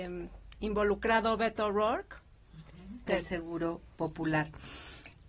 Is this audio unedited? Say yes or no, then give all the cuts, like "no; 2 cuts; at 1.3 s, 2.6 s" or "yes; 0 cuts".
no; 1 cut; at 3.1 s